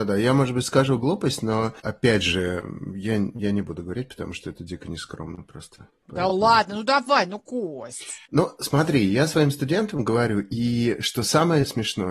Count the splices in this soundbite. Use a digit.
0